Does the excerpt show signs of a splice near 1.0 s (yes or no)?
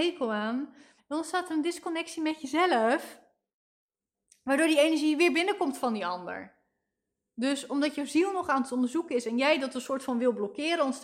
yes